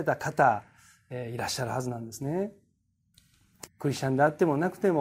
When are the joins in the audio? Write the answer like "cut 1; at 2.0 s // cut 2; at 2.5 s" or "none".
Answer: cut 1; at 3.7 s